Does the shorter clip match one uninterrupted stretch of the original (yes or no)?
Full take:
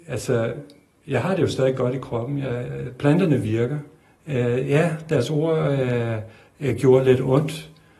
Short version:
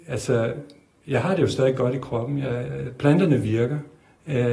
yes